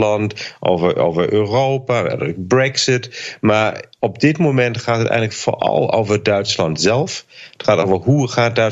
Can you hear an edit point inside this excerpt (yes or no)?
no